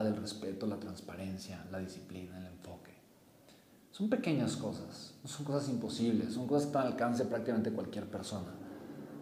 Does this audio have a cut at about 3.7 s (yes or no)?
no